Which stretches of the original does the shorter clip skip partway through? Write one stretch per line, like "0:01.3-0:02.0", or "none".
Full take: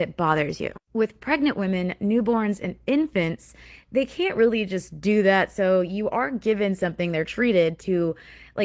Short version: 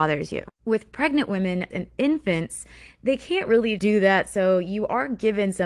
0:02.0-0:02.6
0:04.7-0:05.0